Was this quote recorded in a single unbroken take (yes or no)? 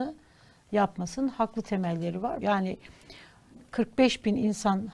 no